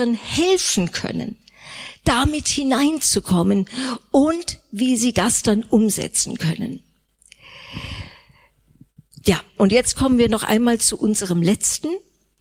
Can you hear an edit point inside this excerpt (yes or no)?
yes